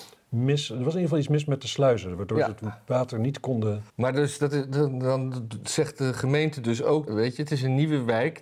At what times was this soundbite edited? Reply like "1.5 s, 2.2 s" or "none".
3.9 s, 7.1 s